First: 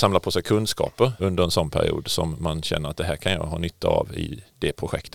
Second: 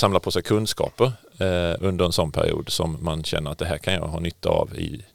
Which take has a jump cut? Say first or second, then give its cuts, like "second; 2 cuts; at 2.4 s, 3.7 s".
first; 1 cut; at 1.2 s